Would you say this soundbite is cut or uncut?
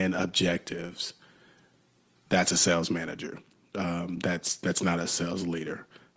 uncut